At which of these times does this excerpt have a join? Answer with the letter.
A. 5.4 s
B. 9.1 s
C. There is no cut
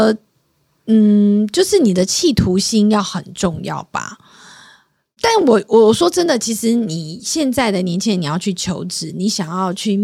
C